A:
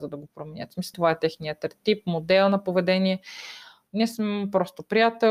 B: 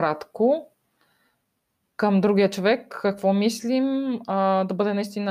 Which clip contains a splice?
A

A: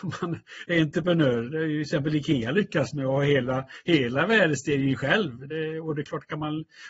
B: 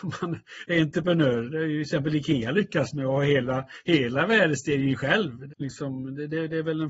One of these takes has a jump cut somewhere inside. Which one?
B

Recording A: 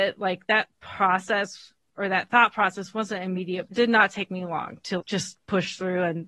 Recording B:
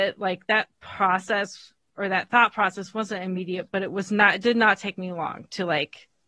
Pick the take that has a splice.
A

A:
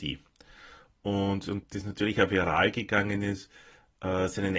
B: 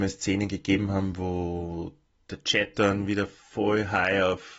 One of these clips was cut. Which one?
A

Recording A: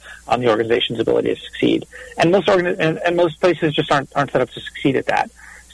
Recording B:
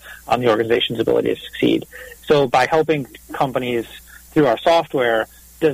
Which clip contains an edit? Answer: B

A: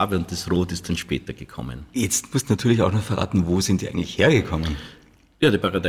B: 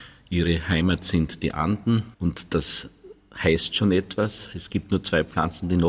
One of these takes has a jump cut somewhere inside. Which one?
B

